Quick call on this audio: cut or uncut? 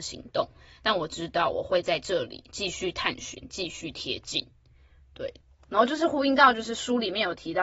uncut